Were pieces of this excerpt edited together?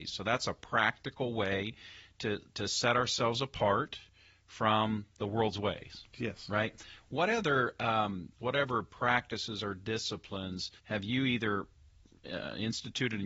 yes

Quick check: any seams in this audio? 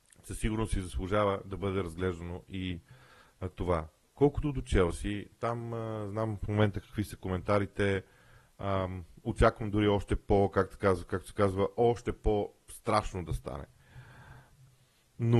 no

